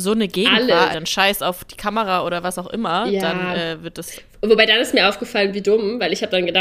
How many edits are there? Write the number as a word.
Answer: one